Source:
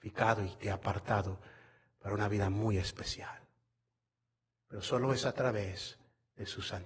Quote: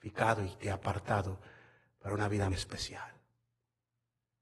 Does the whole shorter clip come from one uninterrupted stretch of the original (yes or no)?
no